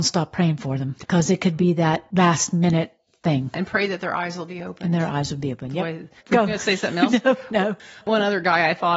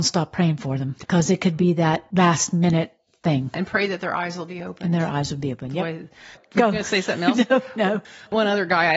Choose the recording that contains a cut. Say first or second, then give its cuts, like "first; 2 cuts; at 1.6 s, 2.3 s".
first; 1 cut; at 6.2 s